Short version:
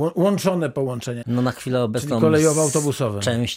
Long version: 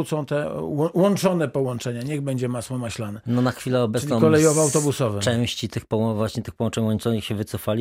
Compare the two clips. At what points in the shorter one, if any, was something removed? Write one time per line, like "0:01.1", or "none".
0:01.2